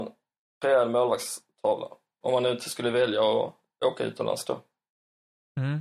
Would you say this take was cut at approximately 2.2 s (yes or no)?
yes